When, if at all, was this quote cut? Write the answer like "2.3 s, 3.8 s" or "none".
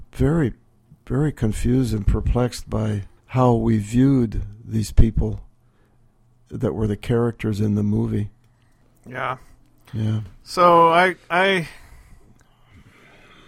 3.2 s